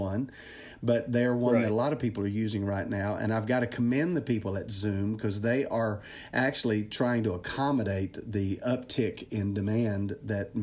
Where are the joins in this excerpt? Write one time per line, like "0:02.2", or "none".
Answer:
none